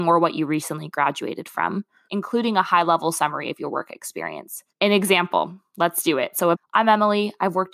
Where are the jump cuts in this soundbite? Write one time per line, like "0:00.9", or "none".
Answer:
0:02.1
0:04.7
0:06.5